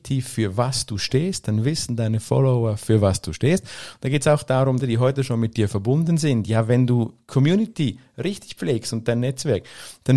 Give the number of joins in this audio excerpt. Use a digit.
1